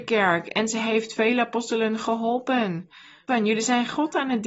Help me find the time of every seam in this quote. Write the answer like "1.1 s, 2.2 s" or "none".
3.3 s

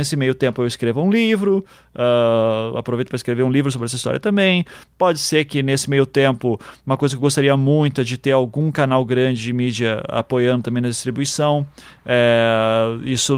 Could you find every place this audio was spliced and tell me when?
none

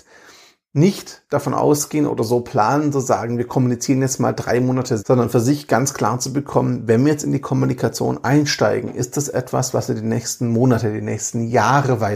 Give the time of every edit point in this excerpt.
5.0 s

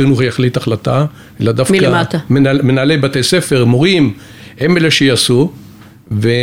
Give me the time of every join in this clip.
none

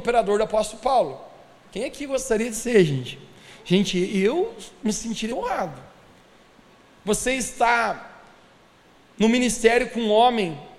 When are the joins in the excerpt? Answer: 5.3 s

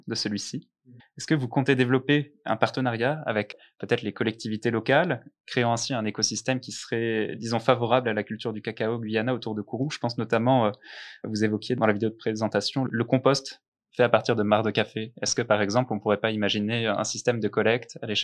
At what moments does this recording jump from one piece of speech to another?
1.0 s

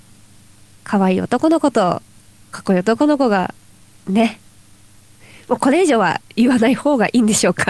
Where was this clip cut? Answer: 6.3 s

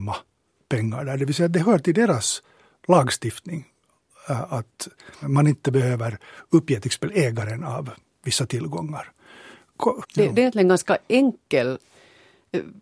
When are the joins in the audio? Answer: 5.2 s, 10.0 s

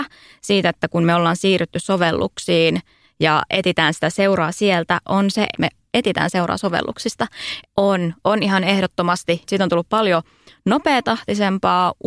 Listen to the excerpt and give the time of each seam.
5.5 s, 7.6 s, 9.4 s

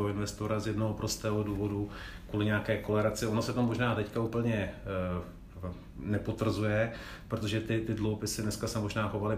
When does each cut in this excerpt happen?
none

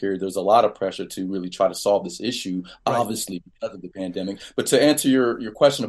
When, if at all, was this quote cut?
none

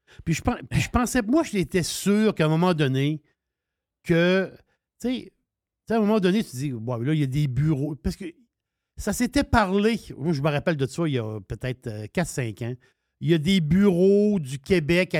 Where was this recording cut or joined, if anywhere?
none

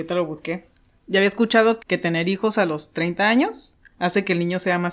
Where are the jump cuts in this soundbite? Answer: 1.8 s

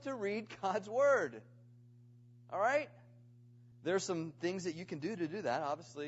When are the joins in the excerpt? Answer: 3.7 s

